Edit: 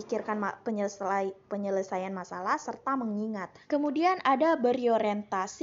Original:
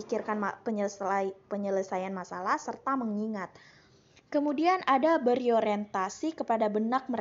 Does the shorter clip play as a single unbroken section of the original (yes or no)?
no